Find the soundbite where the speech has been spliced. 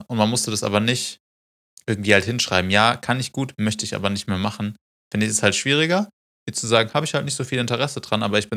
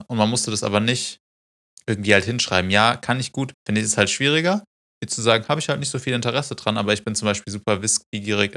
second; 1 cut; at 3.5 s

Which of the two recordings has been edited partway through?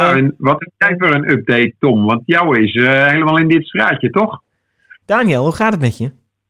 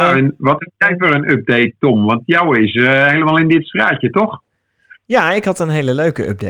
first; 1 cut; at 5.0 s

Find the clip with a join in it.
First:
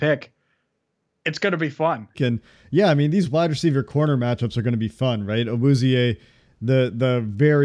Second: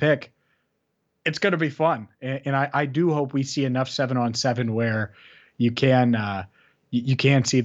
first; 1 cut; at 2.1 s

